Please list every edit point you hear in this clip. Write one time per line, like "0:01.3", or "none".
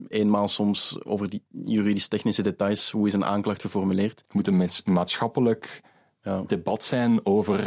0:04.3